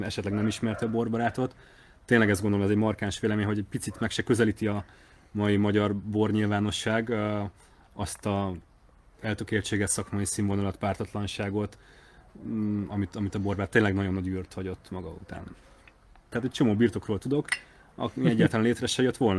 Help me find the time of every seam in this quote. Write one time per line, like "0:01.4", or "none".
0:16.3